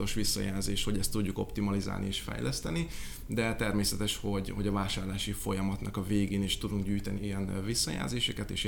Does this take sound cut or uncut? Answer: cut